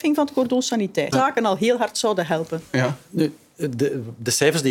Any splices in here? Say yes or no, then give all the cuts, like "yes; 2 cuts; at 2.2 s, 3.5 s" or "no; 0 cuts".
yes; 1 cut; at 1.1 s